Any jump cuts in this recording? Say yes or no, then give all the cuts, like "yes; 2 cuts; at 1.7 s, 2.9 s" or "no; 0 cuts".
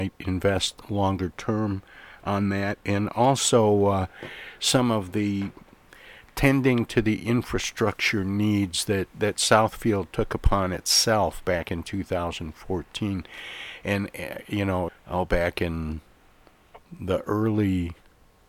yes; 2 cuts; at 14.9 s, 16.9 s